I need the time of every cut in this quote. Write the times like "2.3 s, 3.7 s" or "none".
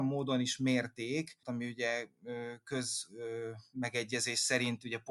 1.4 s